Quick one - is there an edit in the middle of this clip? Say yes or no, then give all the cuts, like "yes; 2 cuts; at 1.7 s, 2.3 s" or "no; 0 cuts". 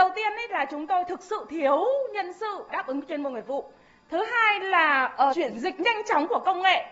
yes; 1 cut; at 5.3 s